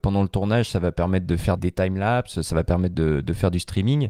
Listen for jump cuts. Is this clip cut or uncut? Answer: cut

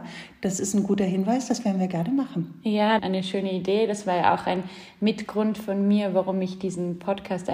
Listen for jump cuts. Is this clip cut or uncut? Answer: cut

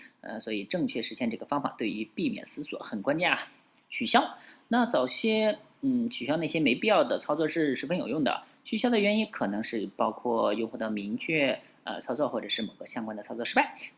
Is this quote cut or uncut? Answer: uncut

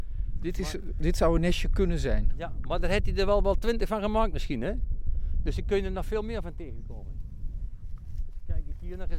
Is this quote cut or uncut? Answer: uncut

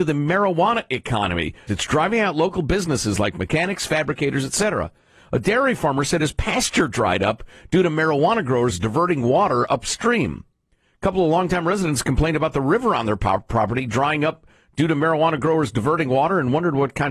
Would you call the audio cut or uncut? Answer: cut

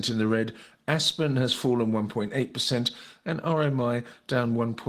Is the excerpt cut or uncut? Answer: uncut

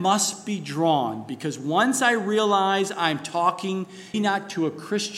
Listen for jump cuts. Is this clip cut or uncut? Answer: cut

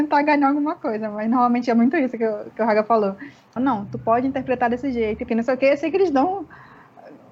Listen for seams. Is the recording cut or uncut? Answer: cut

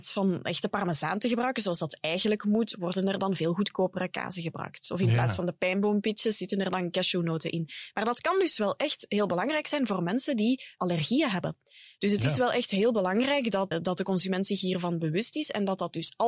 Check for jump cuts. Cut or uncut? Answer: cut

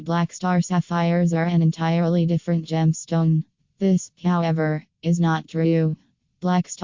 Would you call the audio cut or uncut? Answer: uncut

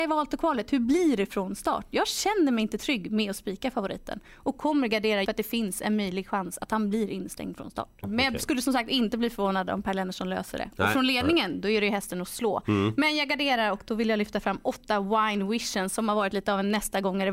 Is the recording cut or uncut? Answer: cut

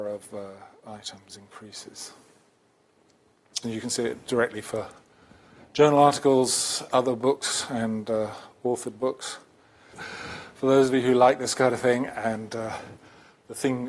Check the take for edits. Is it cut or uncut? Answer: cut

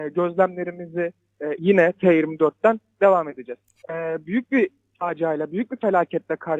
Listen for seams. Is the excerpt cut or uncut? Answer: cut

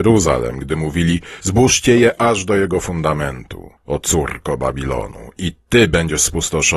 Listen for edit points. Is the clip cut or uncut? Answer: cut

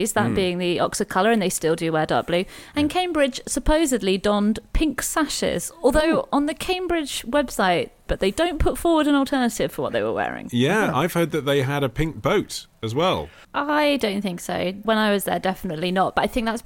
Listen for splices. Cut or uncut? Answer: cut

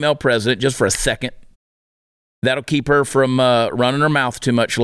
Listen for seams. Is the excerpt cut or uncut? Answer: uncut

